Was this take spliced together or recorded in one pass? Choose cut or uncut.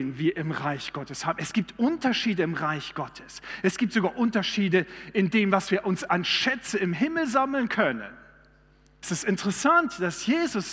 cut